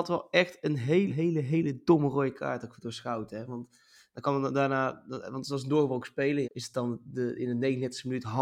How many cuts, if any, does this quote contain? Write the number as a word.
two